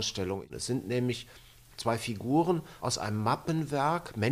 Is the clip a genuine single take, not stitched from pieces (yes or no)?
yes